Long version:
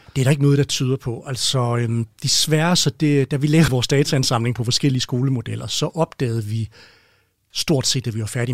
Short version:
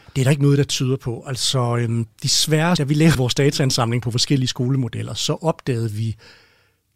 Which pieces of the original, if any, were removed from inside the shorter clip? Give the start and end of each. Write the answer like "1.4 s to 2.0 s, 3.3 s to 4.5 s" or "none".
2.8 s to 3.3 s